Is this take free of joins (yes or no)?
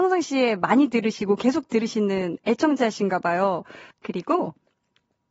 no